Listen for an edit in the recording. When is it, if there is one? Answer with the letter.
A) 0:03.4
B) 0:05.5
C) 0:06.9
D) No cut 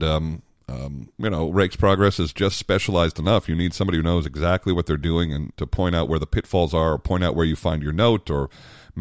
B